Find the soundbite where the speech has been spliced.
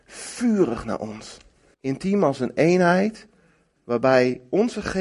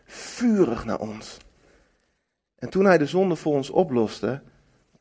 first; 1 cut; at 1.7 s

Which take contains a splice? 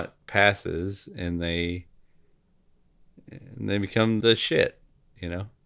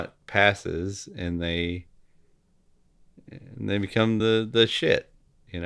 first; 1 cut; at 4.2 s

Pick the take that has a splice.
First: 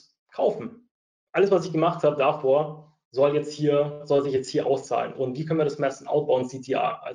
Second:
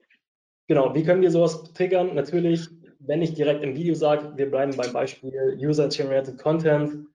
first; 1 cut; at 3.0 s

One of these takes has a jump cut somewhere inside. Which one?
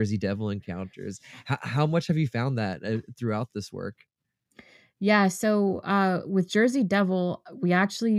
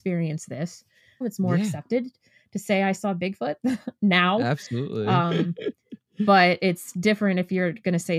second; 1 cut; at 1.2 s

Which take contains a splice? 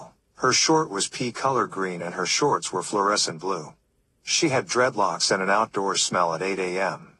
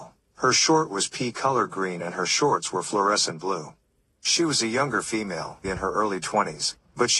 second; 2 cuts; at 4.1 s, 5.6 s

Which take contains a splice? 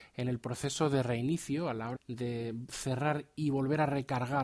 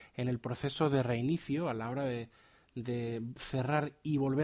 first; 1 cut; at 2.0 s

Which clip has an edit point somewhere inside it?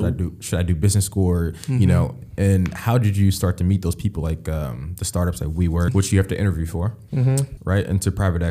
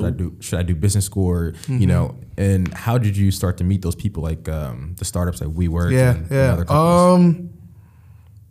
first; 2 cuts; at 5.9 s, 7.6 s

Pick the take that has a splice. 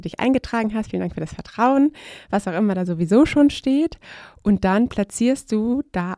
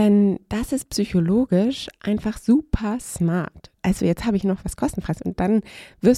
second; 1 cut; at 3.8 s

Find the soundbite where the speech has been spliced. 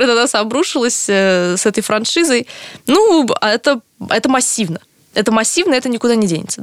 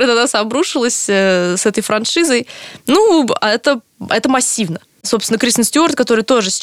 second; 1 cut; at 5.0 s

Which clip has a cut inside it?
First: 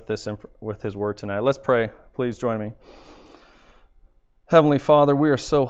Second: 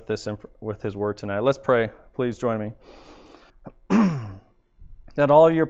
second; 1 cut; at 3.5 s

